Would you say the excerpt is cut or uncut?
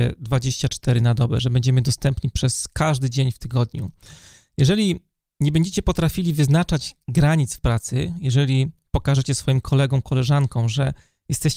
uncut